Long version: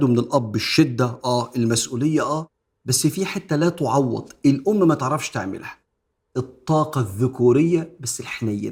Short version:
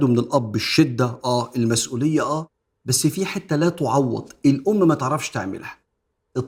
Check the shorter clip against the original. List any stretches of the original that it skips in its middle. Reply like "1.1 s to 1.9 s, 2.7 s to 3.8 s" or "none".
none